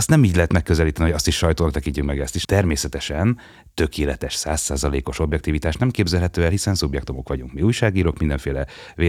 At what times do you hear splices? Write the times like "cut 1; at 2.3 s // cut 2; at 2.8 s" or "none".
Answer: cut 1; at 2.4 s